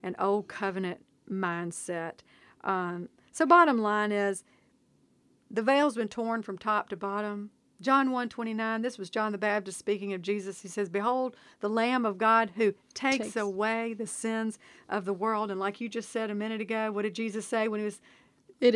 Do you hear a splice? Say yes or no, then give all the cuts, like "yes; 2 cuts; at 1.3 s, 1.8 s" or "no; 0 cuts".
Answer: no; 0 cuts